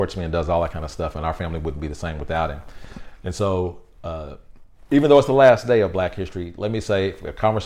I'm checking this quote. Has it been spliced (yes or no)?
no